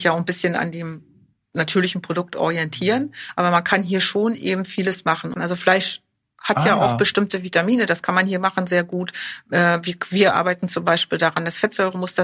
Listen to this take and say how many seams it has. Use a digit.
1